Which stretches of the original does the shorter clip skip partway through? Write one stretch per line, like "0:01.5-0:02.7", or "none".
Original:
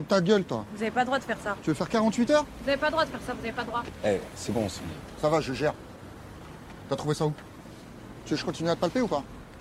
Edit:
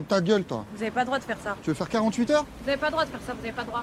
none